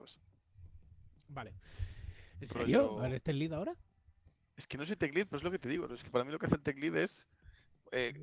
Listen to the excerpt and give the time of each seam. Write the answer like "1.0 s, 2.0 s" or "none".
2.3 s